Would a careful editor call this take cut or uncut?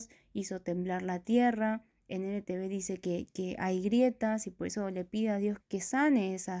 cut